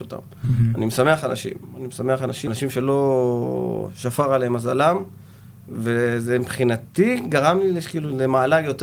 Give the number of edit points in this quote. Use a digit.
1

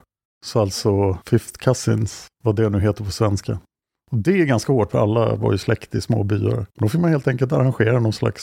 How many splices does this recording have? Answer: 2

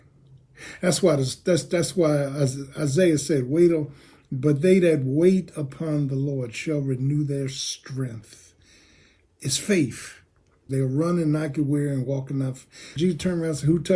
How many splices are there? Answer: 2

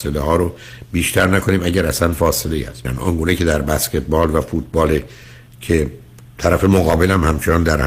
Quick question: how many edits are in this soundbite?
1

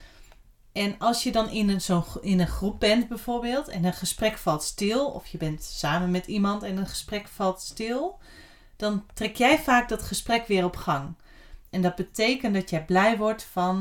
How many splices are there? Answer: 1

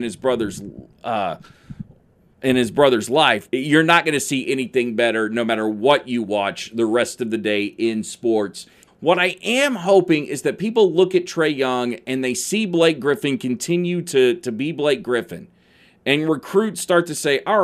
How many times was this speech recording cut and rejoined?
2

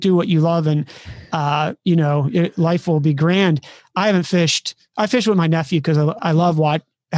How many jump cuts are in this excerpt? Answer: 1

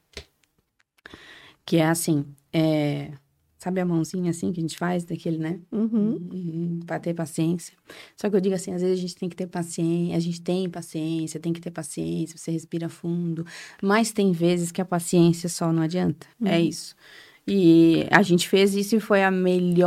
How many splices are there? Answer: 1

